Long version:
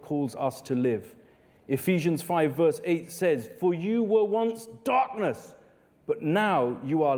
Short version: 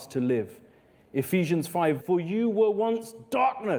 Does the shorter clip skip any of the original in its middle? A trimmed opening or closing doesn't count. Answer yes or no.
yes